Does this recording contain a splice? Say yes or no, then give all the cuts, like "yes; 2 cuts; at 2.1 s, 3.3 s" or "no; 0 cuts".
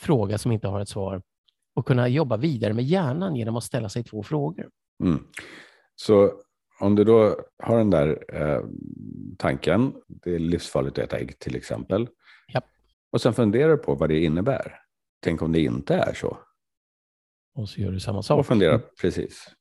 yes; 3 cuts; at 7.5 s, 12.9 s, 15.0 s